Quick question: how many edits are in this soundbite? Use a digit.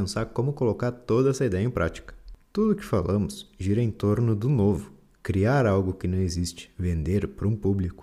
0